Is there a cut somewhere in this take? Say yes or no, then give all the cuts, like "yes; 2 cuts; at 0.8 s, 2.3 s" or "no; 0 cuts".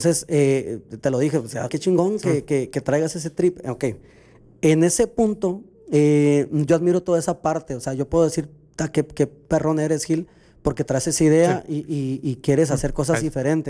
yes; 1 cut; at 1.7 s